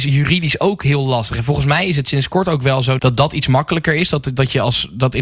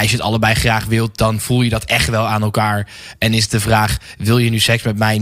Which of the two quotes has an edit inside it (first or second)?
first